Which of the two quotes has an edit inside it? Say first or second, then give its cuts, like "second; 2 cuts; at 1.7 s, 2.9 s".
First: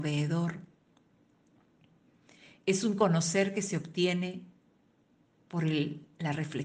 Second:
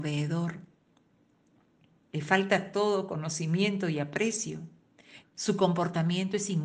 second; 2 cuts; at 2.0 s, 5.2 s